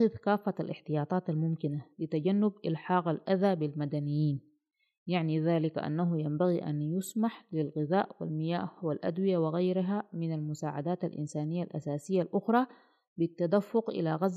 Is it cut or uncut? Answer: uncut